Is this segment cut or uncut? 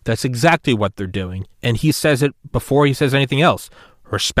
cut